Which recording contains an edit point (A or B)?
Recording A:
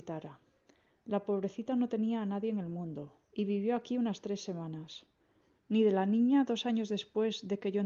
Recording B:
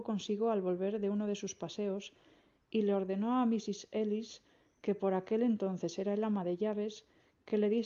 A